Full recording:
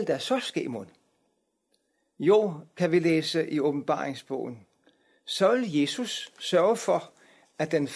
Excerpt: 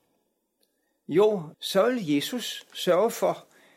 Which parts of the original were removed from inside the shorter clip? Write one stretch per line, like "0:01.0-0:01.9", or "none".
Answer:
0:02.7-0:05.2